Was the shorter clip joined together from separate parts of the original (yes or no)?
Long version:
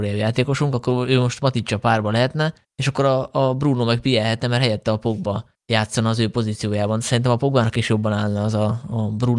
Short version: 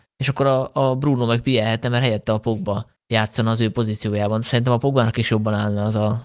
no